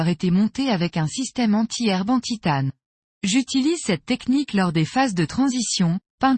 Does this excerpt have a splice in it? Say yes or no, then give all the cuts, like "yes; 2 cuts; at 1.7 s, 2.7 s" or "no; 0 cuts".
yes; 1 cut; at 3.0 s